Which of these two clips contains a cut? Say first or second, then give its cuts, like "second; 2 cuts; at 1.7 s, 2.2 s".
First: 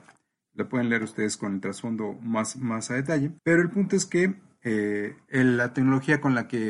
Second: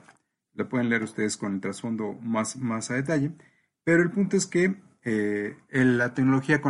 first; 1 cut; at 3.4 s